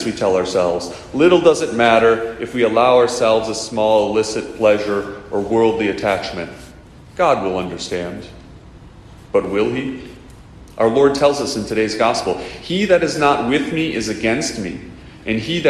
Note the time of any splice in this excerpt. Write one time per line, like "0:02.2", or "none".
none